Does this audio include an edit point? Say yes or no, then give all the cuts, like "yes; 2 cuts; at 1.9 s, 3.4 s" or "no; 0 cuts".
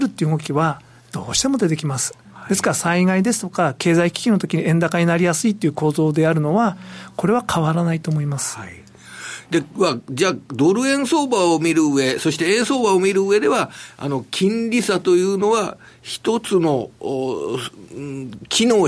no; 0 cuts